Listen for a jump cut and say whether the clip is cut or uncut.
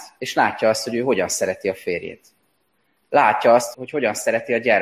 cut